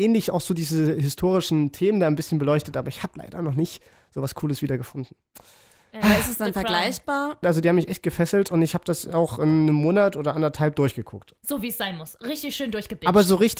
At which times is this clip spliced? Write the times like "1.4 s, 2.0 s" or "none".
7.4 s